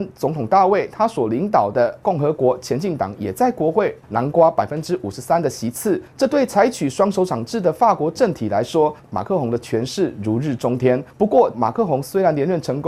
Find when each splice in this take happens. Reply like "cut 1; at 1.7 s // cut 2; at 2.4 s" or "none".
cut 1; at 9.0 s // cut 2; at 11.5 s